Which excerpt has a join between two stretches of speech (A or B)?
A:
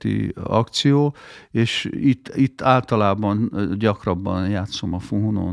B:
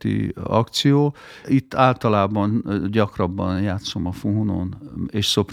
B